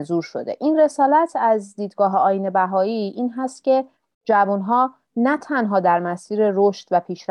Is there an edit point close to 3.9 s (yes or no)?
no